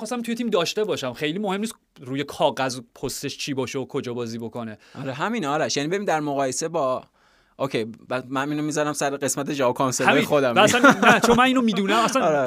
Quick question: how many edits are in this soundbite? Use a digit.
0